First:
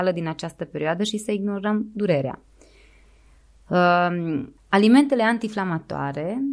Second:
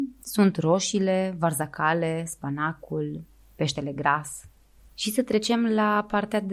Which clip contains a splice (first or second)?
first